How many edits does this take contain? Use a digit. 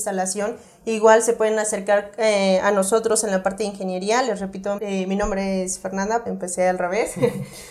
2